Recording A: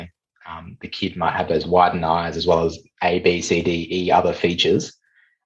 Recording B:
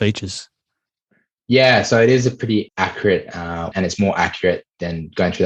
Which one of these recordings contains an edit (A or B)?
B